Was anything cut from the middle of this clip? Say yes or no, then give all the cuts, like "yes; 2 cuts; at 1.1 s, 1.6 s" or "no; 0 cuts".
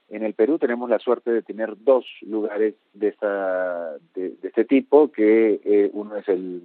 no; 0 cuts